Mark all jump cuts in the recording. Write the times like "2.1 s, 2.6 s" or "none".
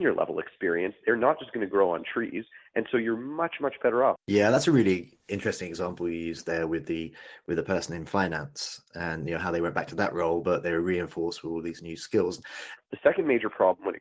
4.2 s, 12.8 s